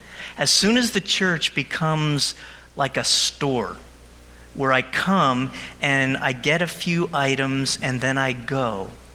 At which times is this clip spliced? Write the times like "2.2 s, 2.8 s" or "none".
none